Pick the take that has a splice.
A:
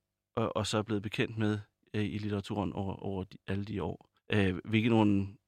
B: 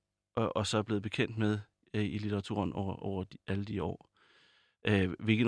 A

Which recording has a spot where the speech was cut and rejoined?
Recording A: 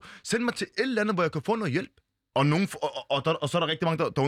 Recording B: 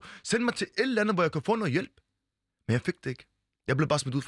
A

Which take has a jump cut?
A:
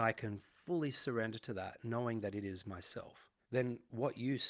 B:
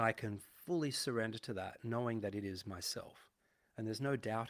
A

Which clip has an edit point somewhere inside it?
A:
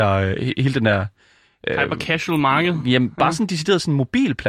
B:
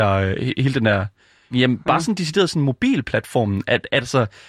B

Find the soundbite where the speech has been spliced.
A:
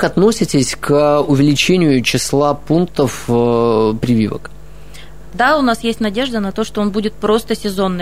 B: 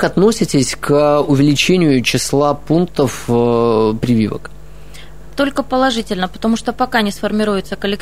A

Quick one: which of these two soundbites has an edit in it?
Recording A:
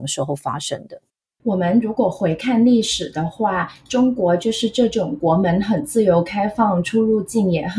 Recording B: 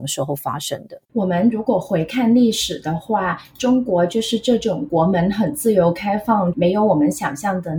B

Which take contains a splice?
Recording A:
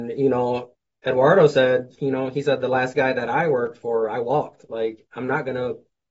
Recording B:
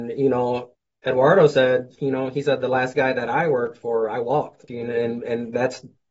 B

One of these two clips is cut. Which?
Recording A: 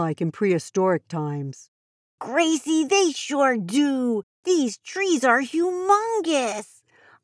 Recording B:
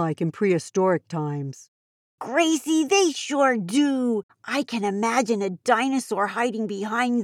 B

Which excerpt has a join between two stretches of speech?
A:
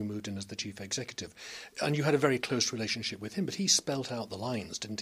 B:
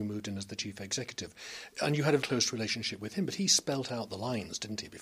B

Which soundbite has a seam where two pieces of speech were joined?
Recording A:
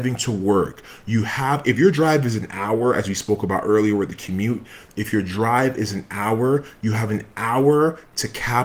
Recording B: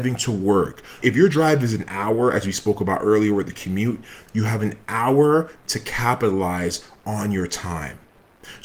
B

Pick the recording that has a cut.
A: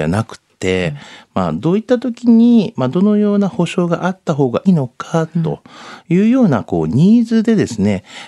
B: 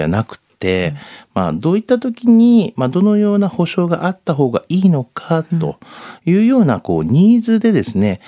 A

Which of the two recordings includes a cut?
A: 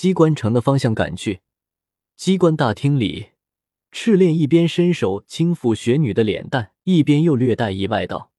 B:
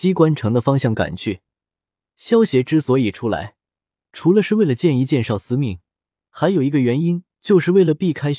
A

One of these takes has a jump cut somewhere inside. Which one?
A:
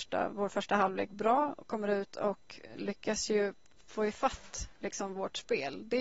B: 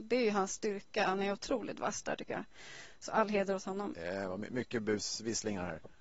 B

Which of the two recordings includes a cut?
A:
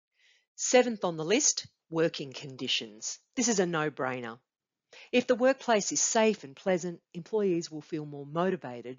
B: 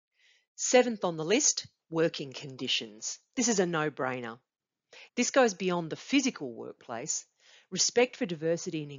B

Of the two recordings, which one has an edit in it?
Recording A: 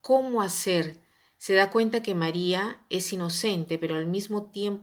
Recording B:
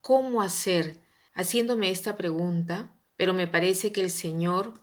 B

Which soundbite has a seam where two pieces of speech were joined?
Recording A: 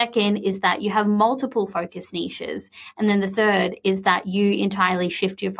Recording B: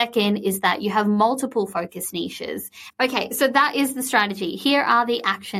B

